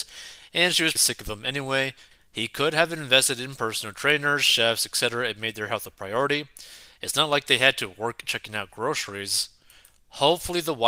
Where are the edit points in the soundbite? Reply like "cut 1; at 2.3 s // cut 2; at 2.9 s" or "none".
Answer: cut 1; at 1.0 s // cut 2; at 2.1 s